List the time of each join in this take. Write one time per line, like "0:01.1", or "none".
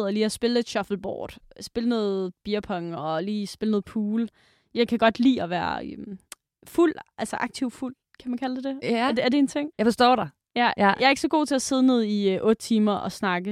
0:09.7

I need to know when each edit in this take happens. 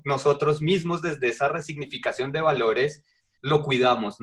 none

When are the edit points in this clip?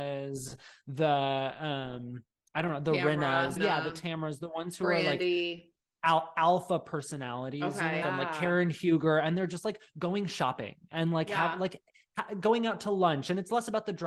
0:03.6
0:08.0

